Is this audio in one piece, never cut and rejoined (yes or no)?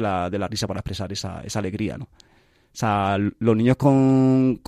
no